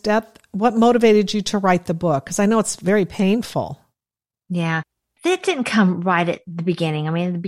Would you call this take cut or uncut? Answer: uncut